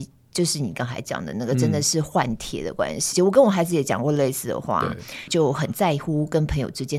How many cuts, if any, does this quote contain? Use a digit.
2